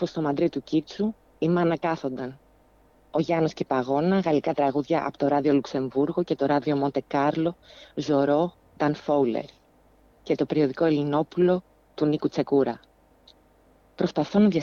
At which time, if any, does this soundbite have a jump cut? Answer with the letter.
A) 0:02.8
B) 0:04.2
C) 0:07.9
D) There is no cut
D